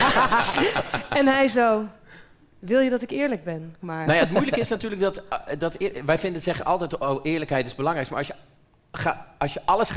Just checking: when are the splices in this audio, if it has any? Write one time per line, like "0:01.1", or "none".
0:03.8